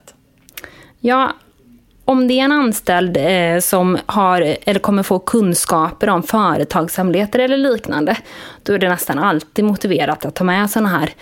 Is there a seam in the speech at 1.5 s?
no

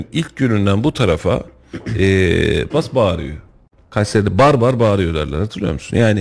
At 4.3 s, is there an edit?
no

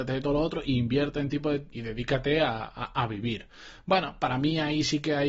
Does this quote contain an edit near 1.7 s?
yes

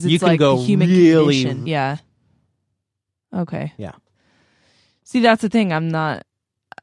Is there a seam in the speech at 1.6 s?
yes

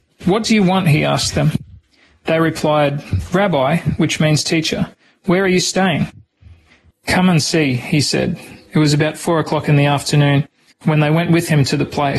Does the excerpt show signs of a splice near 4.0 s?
no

